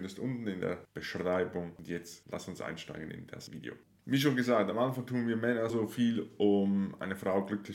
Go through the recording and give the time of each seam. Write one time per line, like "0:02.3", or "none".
0:01.8
0:05.7